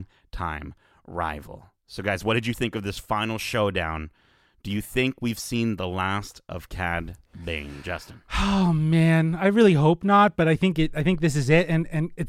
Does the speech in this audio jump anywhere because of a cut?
no; 0 cuts

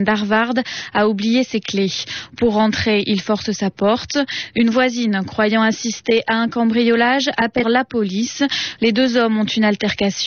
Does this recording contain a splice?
yes; 2 cuts; at 7.6 s, 8.8 s

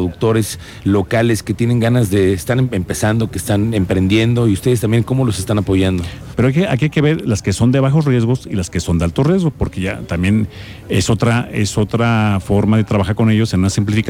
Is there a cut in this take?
yes; 1 cut; at 6.3 s

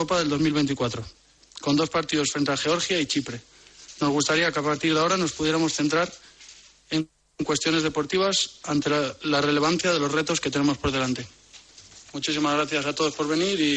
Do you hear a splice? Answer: no; 0 cuts

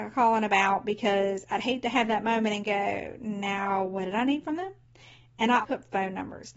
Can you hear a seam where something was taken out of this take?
yes; 1 cut; at 5.6 s

